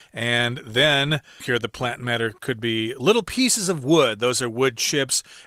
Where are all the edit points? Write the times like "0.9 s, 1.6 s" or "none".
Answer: 1.4 s